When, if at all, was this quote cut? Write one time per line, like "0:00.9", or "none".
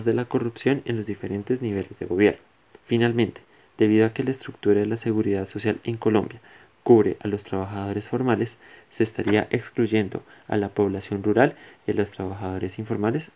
0:02.8